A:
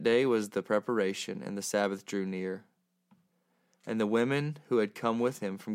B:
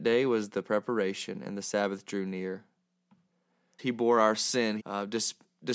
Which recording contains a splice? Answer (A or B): B